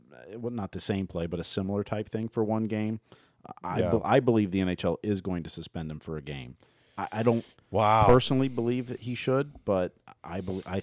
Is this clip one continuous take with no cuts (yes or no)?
yes